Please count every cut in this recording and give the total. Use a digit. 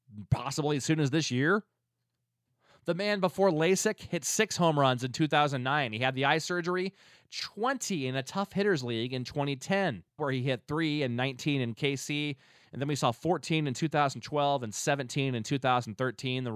1